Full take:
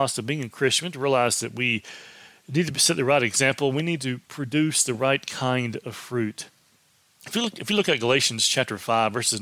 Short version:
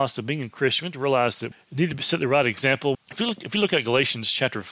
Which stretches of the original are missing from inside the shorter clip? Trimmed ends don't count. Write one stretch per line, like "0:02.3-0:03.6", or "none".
0:01.5-0:02.3
0:03.7-0:07.1